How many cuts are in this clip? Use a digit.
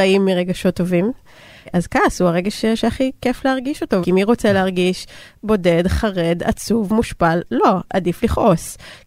1